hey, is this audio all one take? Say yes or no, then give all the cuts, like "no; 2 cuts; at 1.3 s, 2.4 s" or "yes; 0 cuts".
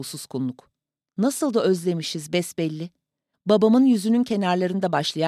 no; 2 cuts; at 1.0 s, 3.3 s